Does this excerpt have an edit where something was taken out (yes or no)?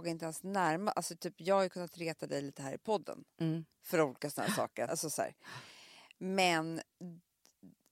yes